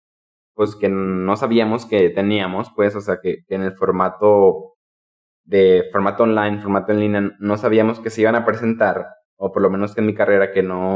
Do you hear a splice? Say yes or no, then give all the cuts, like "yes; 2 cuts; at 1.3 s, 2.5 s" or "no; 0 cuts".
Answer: no; 0 cuts